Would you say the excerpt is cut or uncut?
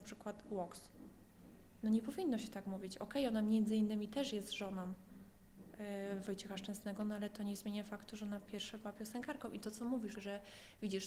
cut